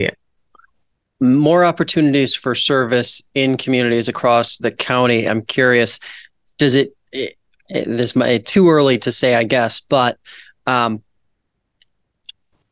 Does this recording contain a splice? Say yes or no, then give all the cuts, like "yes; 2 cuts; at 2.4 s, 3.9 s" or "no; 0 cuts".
yes; 1 cut; at 4.6 s